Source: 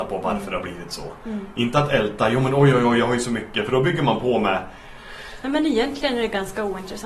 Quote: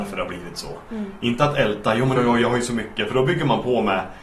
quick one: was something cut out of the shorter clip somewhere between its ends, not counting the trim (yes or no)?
yes